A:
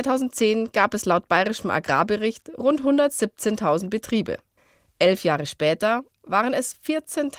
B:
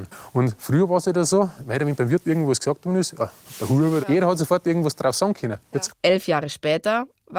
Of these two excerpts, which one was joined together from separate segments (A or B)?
B